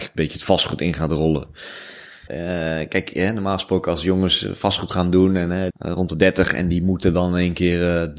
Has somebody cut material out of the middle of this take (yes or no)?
yes